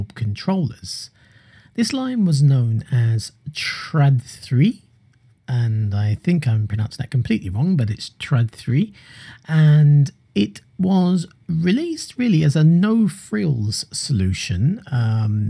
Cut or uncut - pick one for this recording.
uncut